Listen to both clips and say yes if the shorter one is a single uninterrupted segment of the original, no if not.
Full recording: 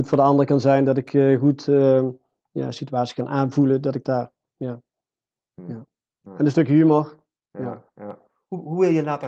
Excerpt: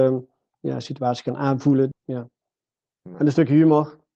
no